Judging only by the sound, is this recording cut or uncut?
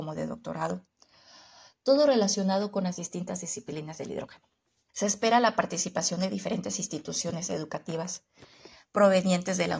cut